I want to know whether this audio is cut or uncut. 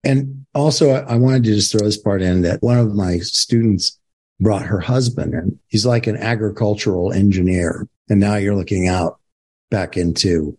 cut